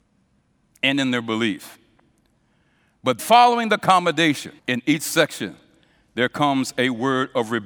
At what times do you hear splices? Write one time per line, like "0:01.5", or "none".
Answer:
0:03.2
0:04.6

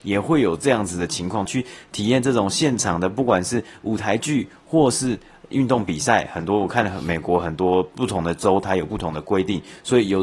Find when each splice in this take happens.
0:01.5

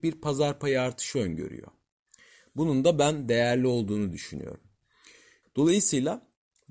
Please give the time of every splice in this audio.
0:05.4

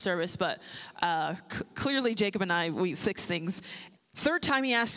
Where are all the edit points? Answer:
0:04.0

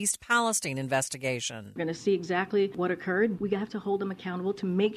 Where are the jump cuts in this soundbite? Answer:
0:03.4

